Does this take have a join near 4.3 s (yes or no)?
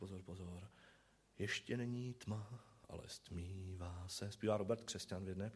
no